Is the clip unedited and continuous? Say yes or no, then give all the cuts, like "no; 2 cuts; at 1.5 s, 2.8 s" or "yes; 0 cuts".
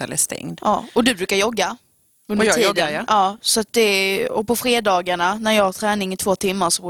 yes; 0 cuts